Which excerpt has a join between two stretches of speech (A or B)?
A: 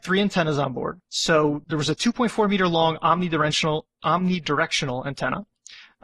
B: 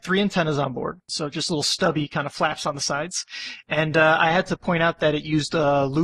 B